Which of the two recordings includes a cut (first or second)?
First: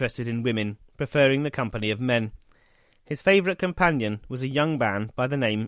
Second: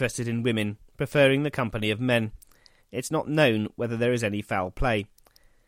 second